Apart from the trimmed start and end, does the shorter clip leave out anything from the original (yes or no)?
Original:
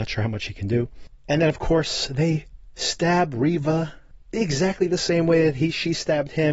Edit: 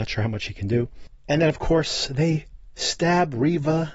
no